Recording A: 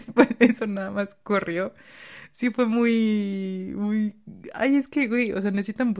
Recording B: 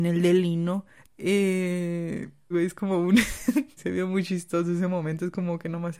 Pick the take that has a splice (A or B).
B